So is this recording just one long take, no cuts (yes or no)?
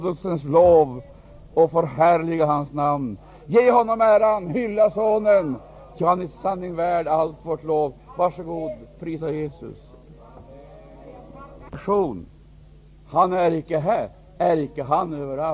yes